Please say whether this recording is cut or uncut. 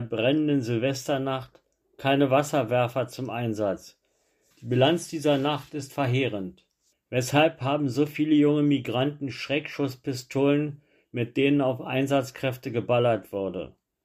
cut